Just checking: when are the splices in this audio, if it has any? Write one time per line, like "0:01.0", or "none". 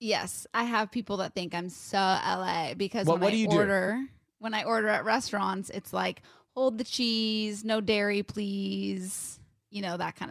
none

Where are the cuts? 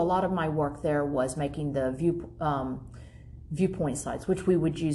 none

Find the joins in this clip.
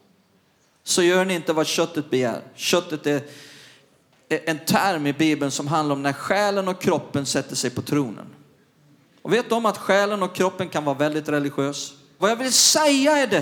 0:12.2

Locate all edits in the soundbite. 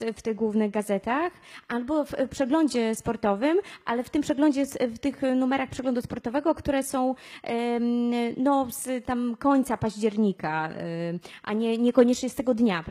none

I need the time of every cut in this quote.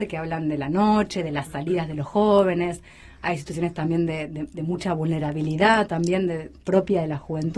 none

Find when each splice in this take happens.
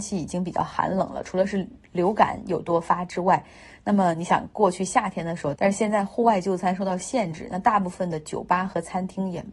0:05.6

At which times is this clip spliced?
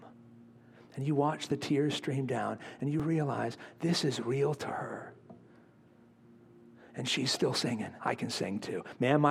0:08.0

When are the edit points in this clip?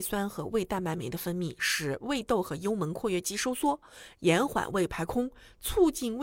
none

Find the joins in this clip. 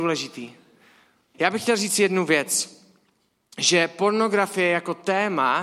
0:01.3

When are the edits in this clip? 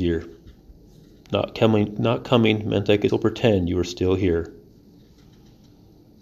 0:01.3
0:03.1

